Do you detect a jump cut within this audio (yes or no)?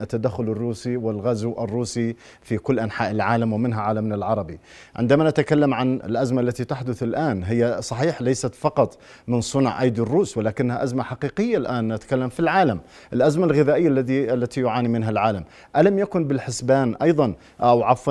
yes